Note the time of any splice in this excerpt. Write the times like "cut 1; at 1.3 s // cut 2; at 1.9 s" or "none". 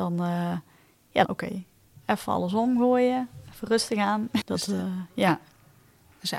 cut 1; at 1.2 s // cut 2; at 4.4 s